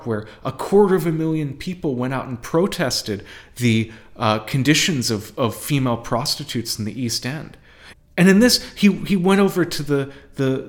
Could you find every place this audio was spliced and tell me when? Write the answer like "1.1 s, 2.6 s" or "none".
7.9 s